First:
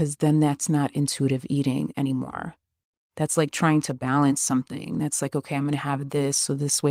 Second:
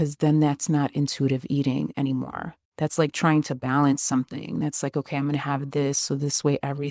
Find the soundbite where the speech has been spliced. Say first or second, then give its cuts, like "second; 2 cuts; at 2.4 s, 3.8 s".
second; 1 cut; at 2.6 s